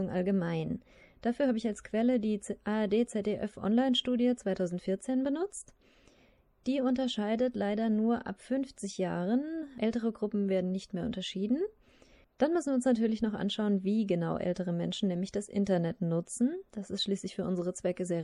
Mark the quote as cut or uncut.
cut